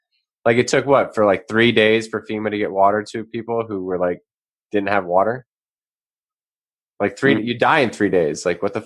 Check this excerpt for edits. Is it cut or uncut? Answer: uncut